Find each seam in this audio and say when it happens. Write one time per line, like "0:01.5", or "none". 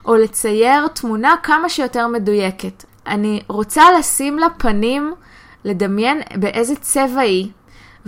0:02.9